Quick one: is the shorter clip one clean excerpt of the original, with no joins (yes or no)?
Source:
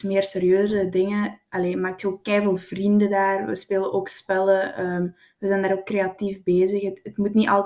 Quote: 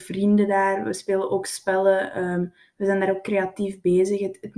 yes